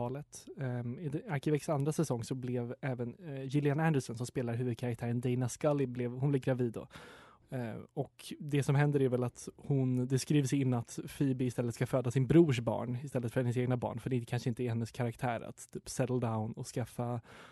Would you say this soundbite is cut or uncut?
cut